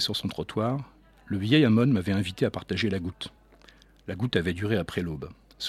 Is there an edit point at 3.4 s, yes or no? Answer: no